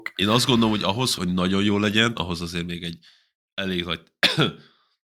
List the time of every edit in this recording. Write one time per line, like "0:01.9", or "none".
0:01.1
0:02.2